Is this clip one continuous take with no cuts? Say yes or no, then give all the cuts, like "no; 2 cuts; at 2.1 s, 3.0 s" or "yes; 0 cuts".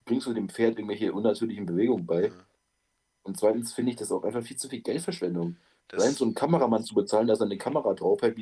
yes; 0 cuts